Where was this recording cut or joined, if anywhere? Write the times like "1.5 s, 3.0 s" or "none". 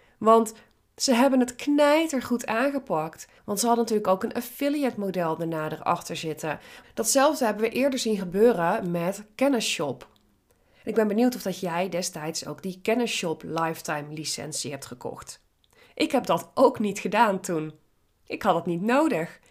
3.4 s, 6.8 s